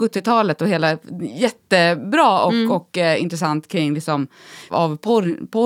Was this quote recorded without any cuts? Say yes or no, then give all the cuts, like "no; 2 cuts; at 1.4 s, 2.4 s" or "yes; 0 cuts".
no; 1 cut; at 4.7 s